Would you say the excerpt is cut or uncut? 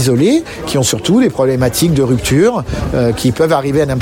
uncut